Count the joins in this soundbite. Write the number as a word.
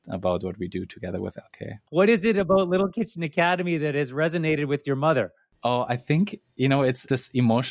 one